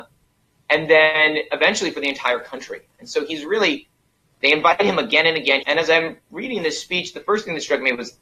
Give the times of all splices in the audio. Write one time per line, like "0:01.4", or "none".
0:05.6

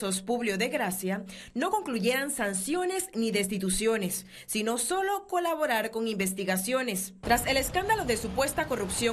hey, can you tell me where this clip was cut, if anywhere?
0:07.2

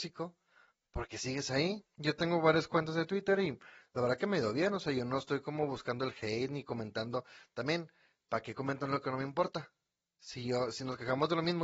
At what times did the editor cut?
none

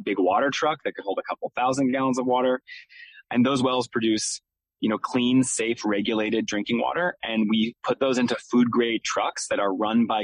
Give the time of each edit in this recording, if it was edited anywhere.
0:03.2

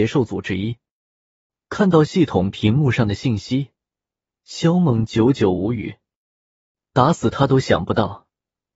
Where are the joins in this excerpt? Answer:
none

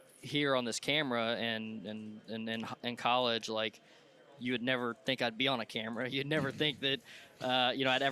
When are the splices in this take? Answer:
none

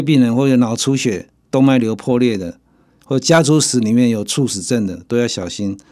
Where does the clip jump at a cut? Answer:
none

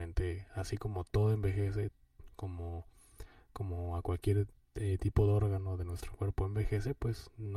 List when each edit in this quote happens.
none

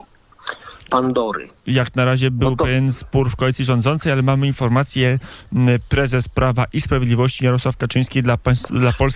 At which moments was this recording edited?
none

